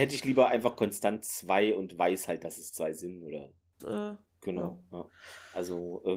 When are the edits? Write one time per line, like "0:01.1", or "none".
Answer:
0:03.8

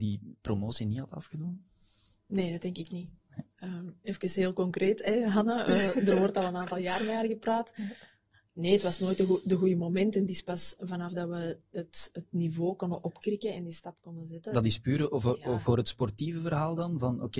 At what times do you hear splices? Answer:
none

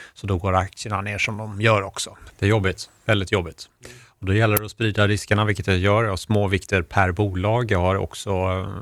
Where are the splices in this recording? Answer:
0:02.3

